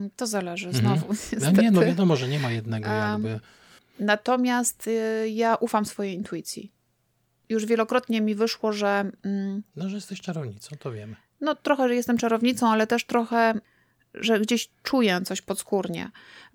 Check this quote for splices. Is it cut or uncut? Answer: cut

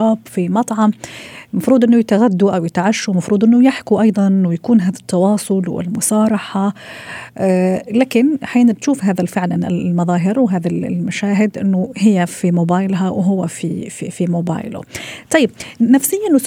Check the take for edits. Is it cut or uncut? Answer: uncut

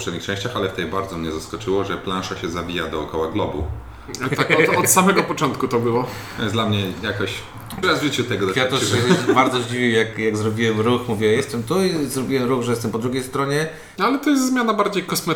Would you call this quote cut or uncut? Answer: cut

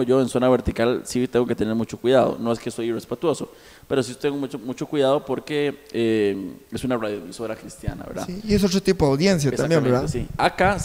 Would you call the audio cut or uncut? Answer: uncut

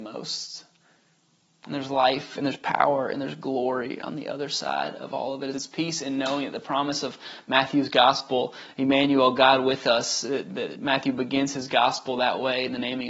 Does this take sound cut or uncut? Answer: cut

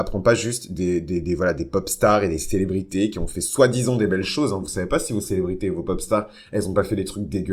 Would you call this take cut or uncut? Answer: uncut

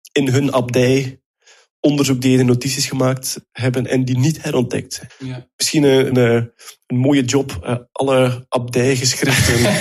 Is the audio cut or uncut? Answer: cut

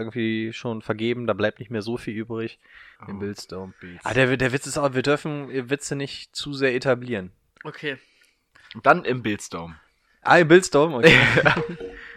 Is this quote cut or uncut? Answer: cut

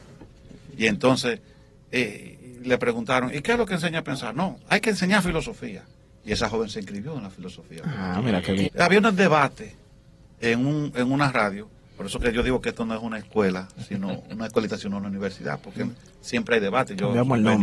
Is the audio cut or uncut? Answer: cut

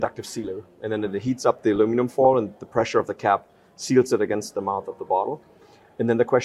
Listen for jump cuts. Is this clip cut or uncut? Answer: uncut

